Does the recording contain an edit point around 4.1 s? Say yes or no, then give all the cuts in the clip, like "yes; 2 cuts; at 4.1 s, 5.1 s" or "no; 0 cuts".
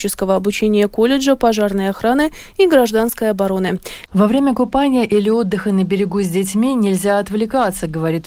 yes; 1 cut; at 4.1 s